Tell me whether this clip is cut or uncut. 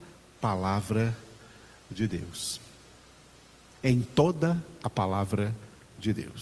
cut